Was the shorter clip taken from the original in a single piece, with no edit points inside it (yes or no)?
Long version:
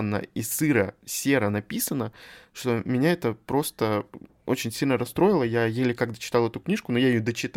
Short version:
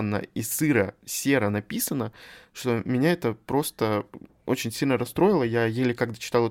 yes